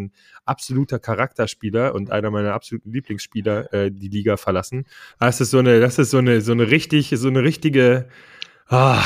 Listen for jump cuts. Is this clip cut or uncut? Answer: cut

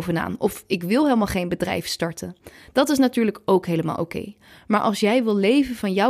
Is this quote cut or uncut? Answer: uncut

